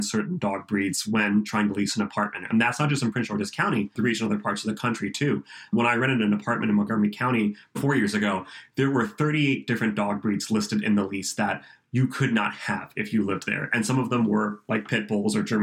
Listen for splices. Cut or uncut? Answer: cut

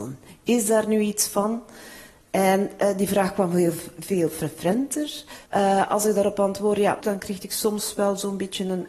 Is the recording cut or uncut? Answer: cut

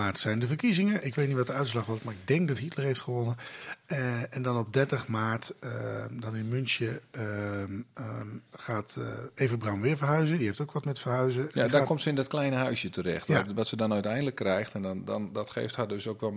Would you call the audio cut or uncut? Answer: uncut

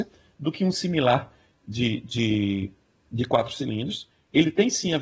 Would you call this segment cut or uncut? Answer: uncut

